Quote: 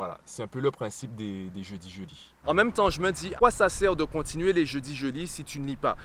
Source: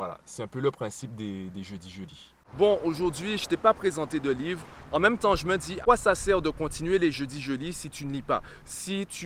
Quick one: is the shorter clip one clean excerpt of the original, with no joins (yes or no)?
no